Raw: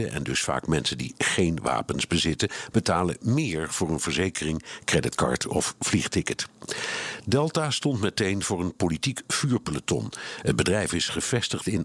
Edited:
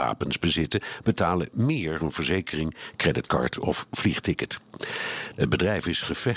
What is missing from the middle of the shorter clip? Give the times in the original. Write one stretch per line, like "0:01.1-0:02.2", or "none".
0:03.7-0:03.9
0:07.2-0:10.4